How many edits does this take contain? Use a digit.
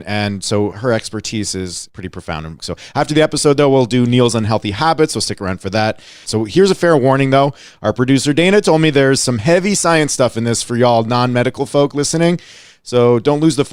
2